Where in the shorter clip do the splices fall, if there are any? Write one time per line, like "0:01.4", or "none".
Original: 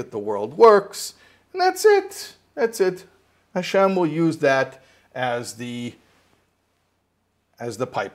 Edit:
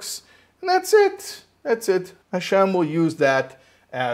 0:02.2

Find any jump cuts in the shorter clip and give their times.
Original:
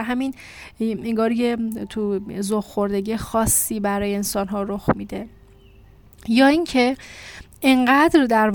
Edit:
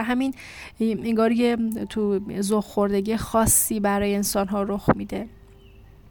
none

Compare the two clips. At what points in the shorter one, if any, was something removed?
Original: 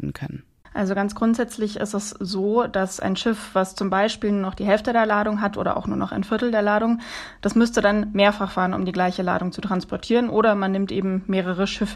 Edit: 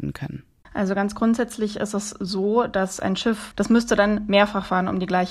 0:03.5

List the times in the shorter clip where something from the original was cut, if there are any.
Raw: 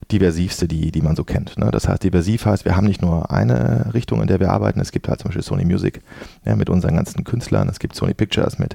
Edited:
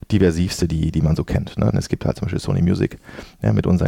0:01.7

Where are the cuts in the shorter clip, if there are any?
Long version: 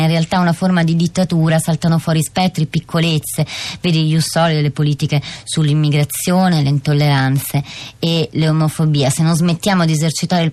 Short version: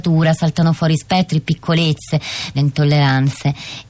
0:02.5

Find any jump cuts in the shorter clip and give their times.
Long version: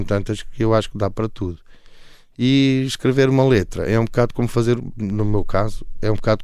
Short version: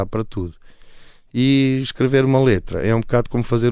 none

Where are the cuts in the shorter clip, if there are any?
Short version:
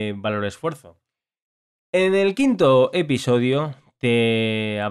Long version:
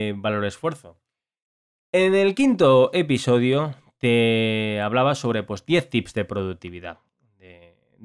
none

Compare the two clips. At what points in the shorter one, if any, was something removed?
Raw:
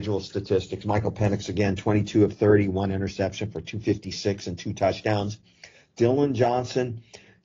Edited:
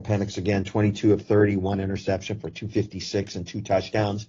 none

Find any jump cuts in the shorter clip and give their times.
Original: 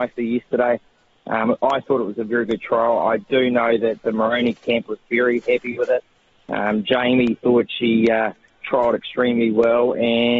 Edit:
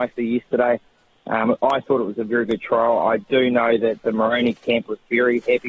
none

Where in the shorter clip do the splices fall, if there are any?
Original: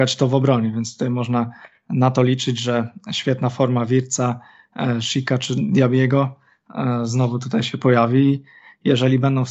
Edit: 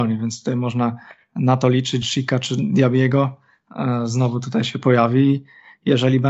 0:02.0

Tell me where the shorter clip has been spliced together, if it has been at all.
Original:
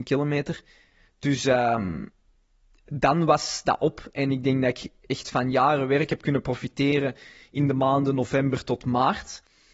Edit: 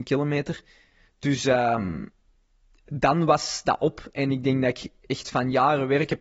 none

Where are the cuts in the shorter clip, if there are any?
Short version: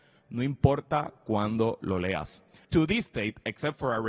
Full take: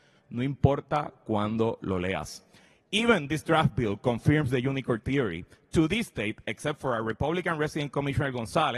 0:02.6

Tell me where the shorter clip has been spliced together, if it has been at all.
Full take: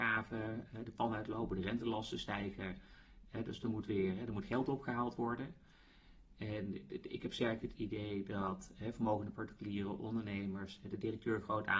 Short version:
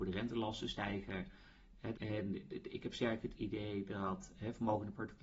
0:01.9

